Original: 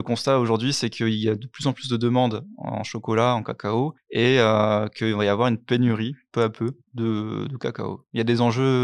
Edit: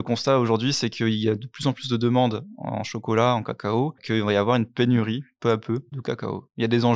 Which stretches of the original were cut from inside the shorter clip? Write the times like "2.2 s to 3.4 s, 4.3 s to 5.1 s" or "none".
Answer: 4.0 s to 4.9 s, 6.8 s to 7.5 s